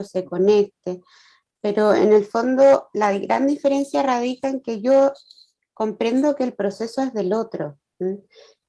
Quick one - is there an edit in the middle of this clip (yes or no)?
no